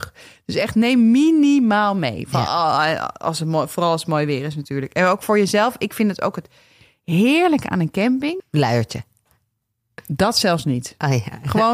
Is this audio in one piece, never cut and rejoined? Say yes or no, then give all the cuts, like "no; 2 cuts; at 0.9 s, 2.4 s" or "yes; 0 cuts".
no; 1 cut; at 8.4 s